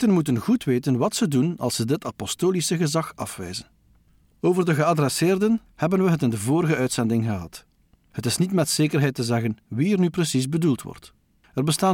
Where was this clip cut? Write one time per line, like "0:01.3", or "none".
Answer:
0:05.7

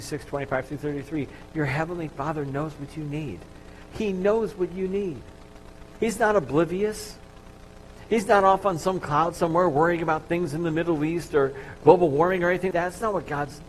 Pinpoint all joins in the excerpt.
0:06.0
0:12.7

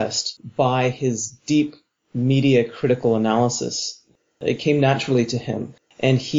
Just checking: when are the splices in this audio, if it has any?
none

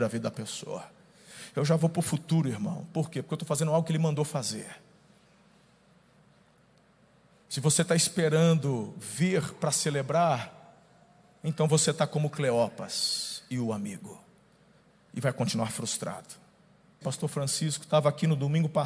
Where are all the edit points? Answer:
0:17.0

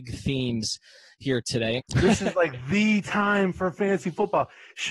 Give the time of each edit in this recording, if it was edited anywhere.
0:01.8

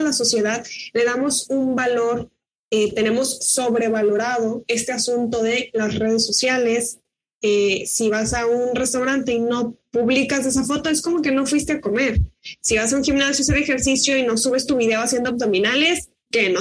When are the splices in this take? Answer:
none

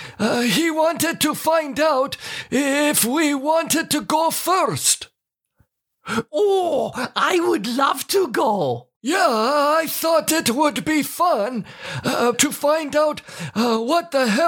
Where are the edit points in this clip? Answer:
0:09.0
0:12.3

